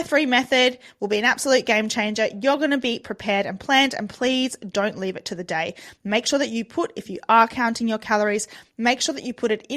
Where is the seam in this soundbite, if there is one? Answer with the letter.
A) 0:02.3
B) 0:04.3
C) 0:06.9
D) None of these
D